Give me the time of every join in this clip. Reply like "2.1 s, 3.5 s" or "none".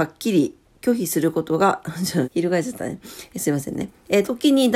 2.3 s